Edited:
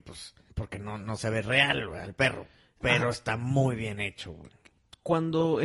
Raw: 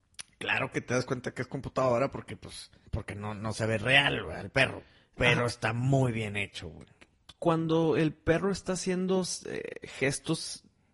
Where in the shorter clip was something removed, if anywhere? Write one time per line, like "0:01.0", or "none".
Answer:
none